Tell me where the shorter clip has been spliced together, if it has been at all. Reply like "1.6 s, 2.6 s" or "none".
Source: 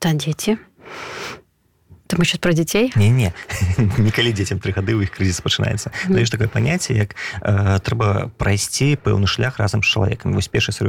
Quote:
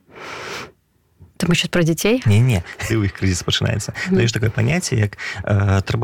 2.9 s